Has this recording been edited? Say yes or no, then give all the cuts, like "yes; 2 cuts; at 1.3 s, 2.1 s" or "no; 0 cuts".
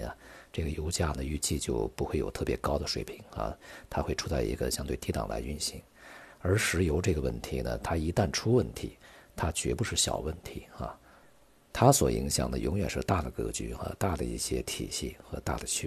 no; 0 cuts